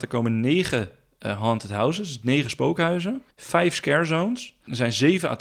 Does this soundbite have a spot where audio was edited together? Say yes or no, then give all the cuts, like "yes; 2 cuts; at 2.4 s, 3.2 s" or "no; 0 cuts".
yes; 1 cut; at 3.3 s